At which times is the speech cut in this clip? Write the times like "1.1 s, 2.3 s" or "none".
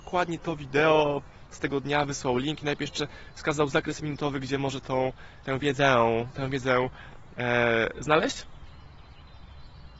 5.4 s